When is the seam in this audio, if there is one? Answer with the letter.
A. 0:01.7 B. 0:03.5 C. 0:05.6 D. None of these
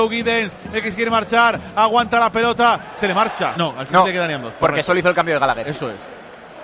B